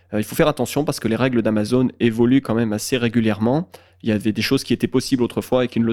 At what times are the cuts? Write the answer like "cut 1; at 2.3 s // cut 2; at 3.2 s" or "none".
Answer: none

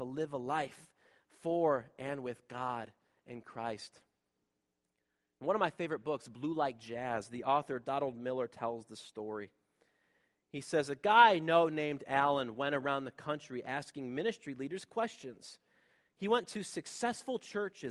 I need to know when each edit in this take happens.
none

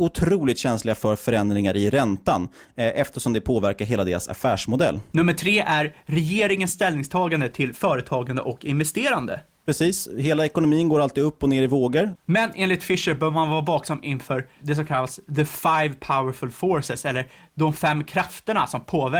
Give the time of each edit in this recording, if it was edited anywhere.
cut 1; at 5.1 s // cut 2; at 9.6 s // cut 3; at 12.2 s

